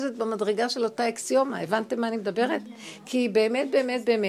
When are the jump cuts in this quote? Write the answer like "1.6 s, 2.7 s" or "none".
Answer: none

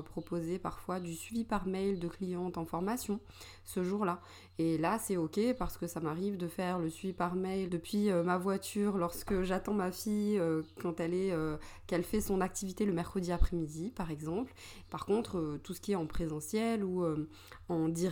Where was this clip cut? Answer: 7.7 s, 14.9 s

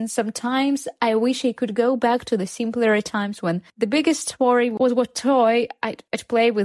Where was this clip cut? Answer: 3.7 s

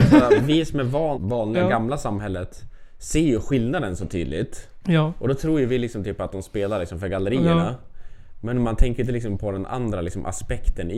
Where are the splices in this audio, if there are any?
1.1 s

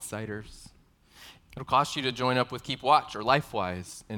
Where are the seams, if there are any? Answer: 1.4 s

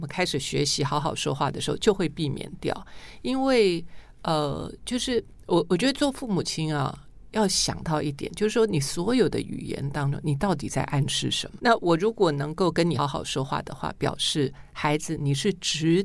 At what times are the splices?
11.6 s, 13.0 s

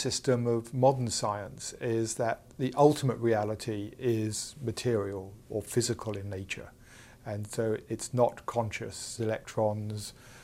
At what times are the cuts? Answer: 9.2 s

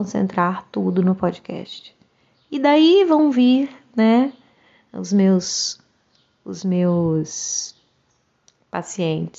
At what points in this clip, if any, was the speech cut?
none

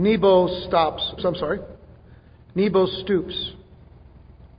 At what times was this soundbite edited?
1.2 s

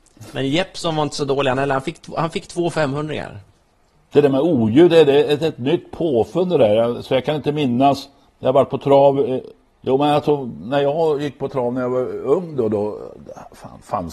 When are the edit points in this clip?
none

